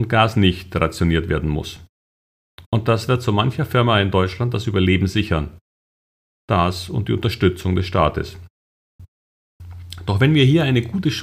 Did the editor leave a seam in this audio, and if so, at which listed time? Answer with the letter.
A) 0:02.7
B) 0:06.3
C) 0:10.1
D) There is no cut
D